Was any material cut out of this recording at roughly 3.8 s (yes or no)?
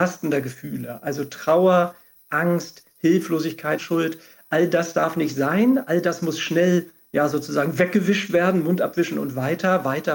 yes